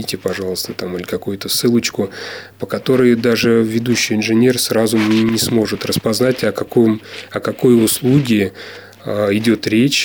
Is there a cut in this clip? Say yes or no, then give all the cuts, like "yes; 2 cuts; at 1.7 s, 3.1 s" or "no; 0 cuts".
no; 0 cuts